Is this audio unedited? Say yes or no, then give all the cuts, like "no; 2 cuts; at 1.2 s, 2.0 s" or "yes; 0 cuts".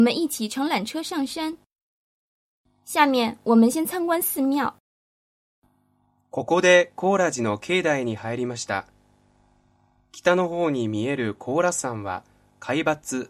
yes; 0 cuts